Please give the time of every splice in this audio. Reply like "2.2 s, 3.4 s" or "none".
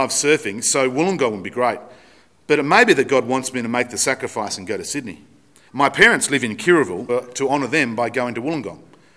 5.7 s, 7.1 s